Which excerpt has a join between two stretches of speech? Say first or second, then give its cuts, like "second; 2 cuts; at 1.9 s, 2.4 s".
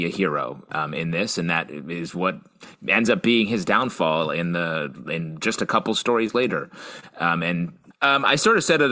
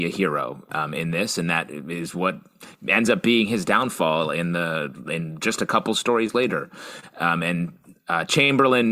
first; 1 cut; at 7.9 s